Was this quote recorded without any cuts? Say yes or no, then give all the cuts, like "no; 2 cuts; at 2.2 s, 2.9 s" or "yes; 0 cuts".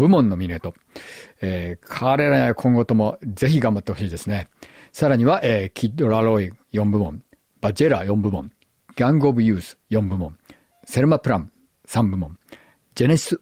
yes; 0 cuts